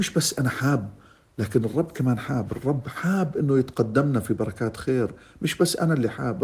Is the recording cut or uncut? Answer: uncut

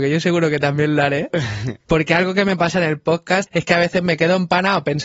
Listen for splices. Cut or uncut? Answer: cut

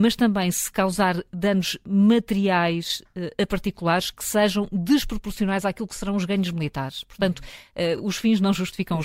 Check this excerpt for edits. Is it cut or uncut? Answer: uncut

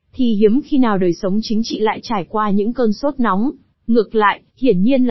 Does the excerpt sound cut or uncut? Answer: cut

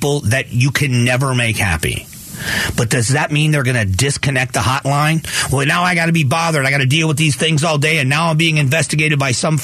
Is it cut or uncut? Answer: uncut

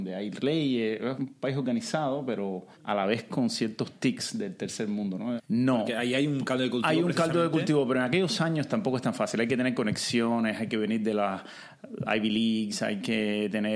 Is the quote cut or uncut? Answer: cut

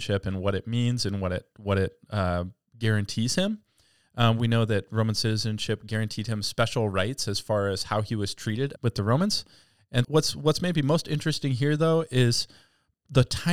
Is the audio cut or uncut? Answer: cut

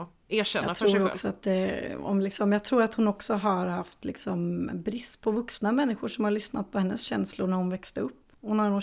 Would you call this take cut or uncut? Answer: uncut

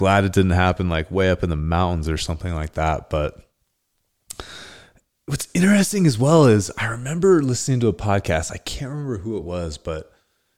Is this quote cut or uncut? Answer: uncut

